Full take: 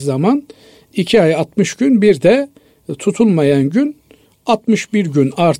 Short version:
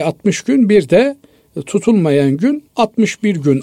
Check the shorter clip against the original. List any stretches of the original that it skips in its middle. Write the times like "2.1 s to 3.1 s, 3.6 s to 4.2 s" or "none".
4.0 s to 4.4 s